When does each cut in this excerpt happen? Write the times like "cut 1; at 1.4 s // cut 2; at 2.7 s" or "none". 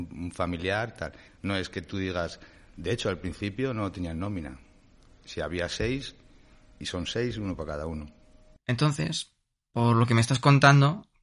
cut 1; at 1.3 s